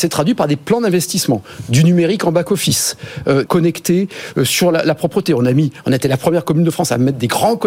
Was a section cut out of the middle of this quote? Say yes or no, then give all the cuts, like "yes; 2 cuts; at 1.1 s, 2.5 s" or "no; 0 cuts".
yes; 1 cut; at 3.4 s